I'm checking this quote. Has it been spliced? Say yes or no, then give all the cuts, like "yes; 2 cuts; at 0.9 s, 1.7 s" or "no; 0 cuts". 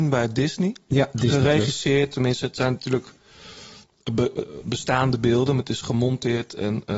no; 0 cuts